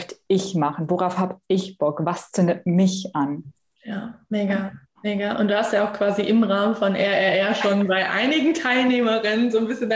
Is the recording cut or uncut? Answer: uncut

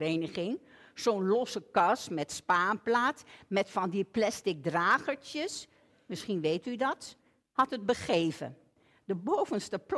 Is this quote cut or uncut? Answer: uncut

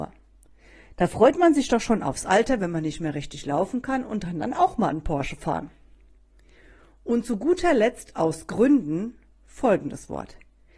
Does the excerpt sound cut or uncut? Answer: uncut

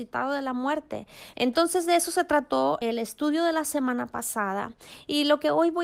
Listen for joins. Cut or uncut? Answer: cut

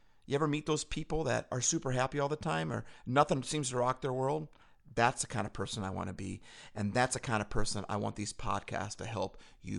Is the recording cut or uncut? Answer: uncut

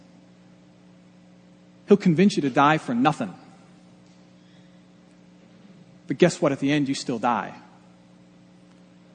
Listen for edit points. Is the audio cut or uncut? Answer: uncut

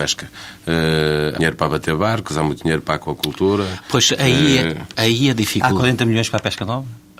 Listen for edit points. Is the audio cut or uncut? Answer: cut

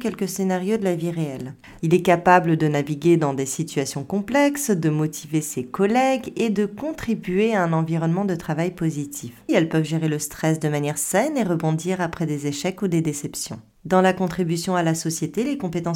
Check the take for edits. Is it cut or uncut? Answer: cut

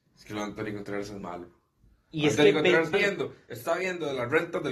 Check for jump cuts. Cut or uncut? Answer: cut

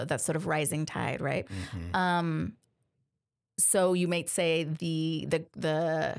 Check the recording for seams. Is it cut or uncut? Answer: cut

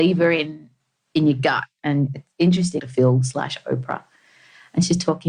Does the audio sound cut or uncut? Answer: cut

